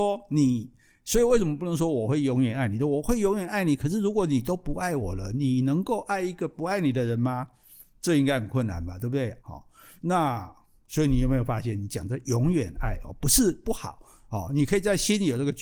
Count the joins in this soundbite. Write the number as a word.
one